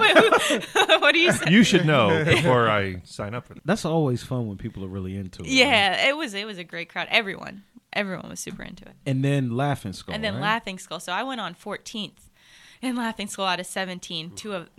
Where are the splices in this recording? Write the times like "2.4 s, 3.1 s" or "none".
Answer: 1.4 s, 3.6 s